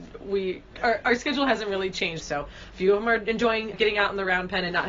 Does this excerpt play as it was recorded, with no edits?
no; 2 cuts; at 2.2 s, 3.7 s

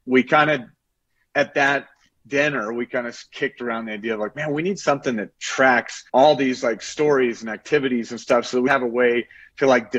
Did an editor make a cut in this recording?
yes; 2 cuts; at 6.1 s, 8.7 s

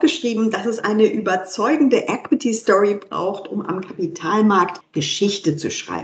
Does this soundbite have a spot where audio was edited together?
no; 0 cuts

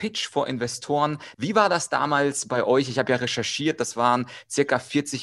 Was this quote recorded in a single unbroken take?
no; 1 cut; at 1.3 s

